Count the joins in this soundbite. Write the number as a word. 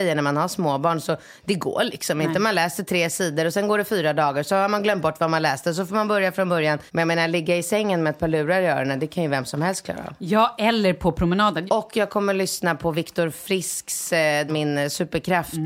three